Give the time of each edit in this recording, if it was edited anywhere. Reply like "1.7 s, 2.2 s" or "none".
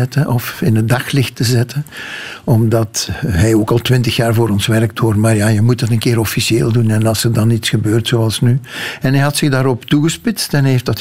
none

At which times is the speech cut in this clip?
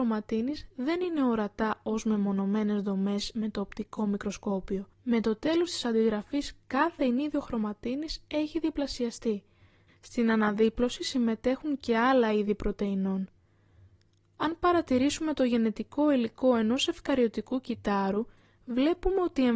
4.9 s, 9.9 s

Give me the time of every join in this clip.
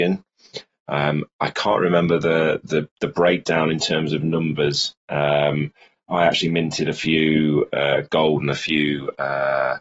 none

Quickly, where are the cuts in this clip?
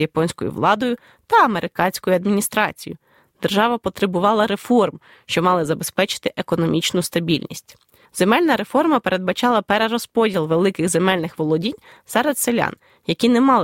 8.1 s

